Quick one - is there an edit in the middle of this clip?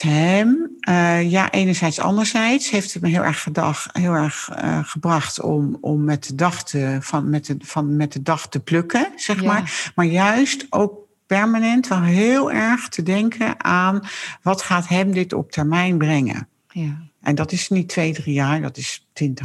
no; 0 cuts

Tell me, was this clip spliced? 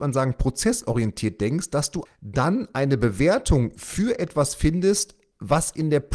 yes; 1 cut; at 2.1 s

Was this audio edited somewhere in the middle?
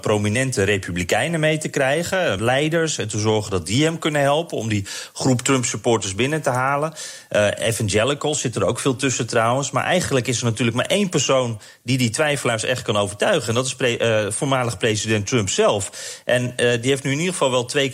yes; 1 cut; at 2.4 s

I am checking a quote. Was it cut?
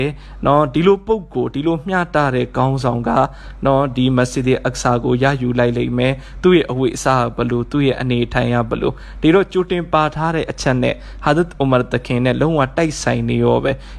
no; 0 cuts

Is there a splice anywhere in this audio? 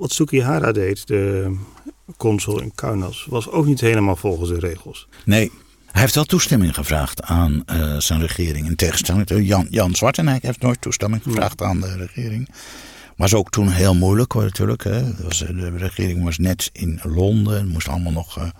no; 0 cuts

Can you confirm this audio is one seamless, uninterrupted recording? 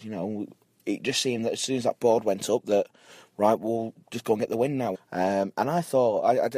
no; 1 cut; at 4.9 s

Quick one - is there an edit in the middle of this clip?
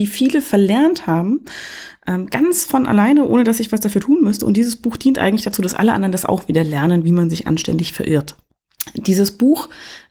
no; 0 cuts

